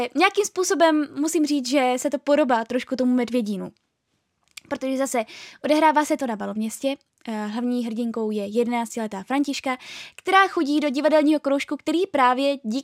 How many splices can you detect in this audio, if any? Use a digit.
0